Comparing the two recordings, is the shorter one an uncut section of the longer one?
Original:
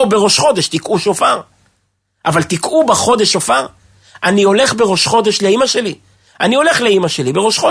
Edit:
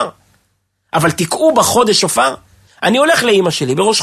no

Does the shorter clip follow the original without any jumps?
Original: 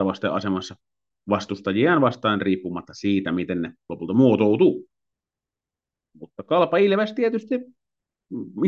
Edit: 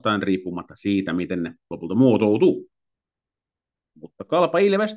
yes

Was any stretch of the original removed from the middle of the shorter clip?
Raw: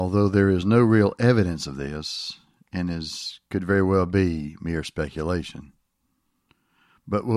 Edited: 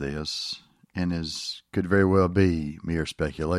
no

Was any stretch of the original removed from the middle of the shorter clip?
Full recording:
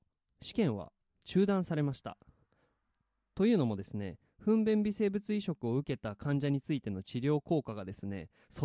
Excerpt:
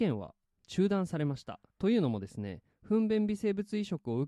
yes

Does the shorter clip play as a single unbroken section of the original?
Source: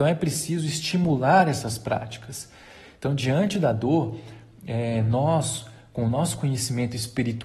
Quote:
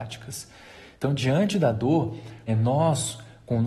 no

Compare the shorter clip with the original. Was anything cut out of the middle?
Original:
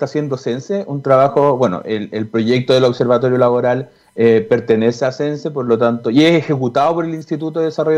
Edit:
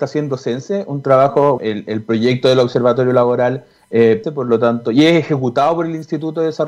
yes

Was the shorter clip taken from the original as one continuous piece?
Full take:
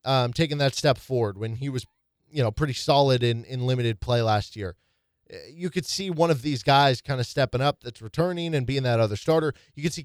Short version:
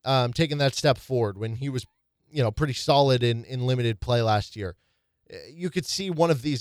yes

